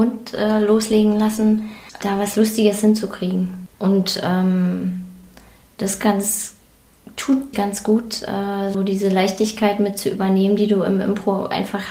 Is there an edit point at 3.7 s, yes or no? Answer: yes